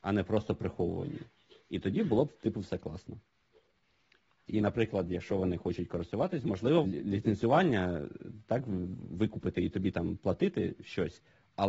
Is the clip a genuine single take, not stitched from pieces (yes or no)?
no